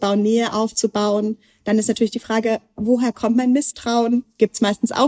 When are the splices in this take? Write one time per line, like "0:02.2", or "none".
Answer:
none